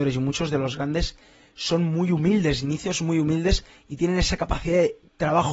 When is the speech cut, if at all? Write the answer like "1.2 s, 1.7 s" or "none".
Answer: none